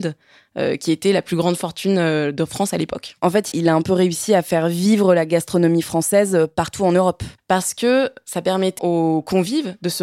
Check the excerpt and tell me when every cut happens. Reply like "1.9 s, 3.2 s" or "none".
3.5 s, 7.4 s, 8.8 s